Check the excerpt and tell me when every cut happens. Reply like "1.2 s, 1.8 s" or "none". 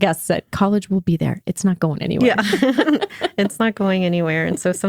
none